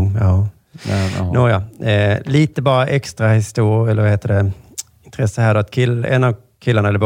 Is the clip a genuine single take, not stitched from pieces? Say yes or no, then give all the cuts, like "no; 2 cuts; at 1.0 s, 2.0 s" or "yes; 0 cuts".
yes; 0 cuts